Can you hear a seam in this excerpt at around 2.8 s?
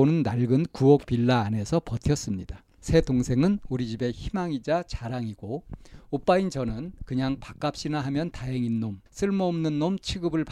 yes; 2 cuts; at 2.8 s, 9.1 s

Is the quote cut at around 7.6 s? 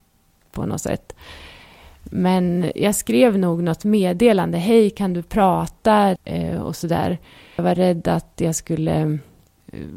yes; 2 cuts; at 6.2 s, 7.6 s

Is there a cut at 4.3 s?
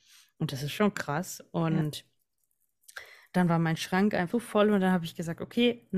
yes; 1 cut; at 4.3 s

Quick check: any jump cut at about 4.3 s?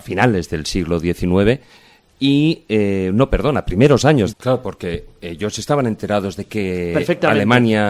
yes; 1 cut; at 4.3 s

